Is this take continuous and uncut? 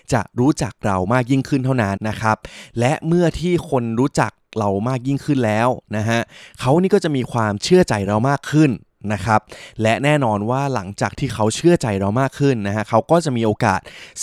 no; 1 cut; at 2.0 s

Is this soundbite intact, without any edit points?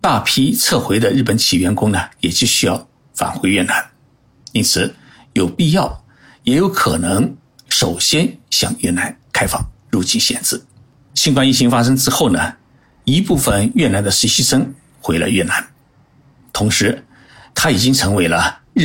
no; 2 cuts; at 11.1 s, 17.5 s

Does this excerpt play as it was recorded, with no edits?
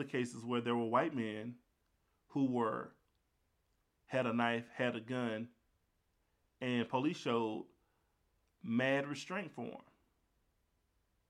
yes; 0 cuts

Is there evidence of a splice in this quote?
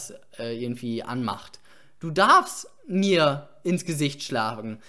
no; 0 cuts

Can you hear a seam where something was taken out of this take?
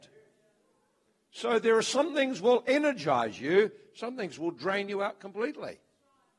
no; 0 cuts

